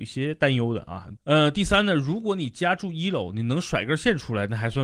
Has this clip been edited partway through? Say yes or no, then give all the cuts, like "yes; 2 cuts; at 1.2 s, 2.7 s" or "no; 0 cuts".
yes; 1 cut; at 1.2 s